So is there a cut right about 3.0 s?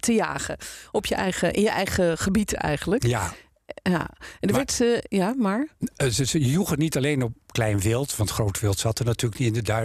no; 0 cuts

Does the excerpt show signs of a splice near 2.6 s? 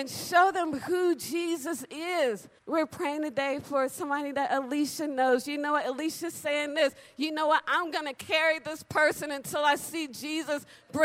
yes; 1 cut; at 2.6 s

